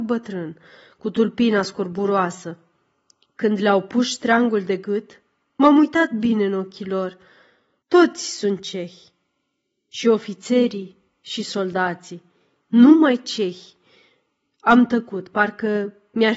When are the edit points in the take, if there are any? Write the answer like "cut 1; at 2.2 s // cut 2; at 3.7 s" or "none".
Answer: cut 1; at 7.8 s

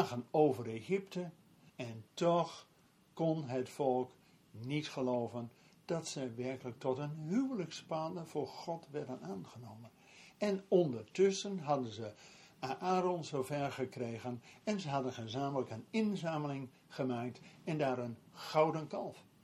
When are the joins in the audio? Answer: cut 1; at 1.7 s

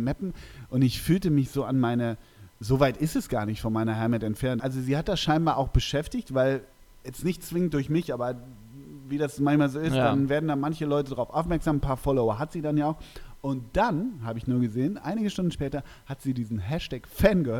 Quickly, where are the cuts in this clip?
cut 1; at 4.6 s

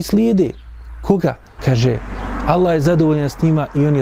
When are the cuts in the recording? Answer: cut 1; at 1.6 s

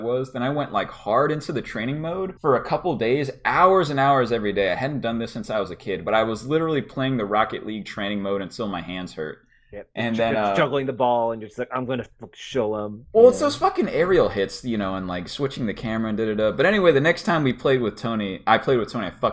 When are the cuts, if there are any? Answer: cut 1; at 2.4 s

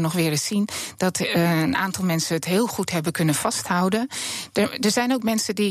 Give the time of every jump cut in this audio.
none

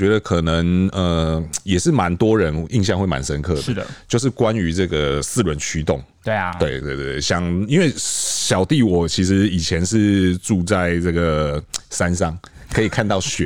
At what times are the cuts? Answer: cut 1; at 6.8 s

